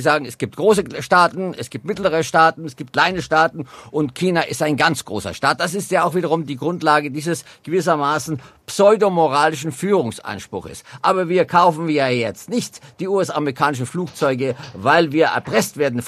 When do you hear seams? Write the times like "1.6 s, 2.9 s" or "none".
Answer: none